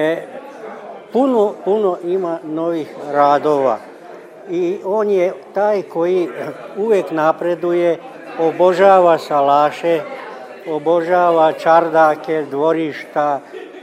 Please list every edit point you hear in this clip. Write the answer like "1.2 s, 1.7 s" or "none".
none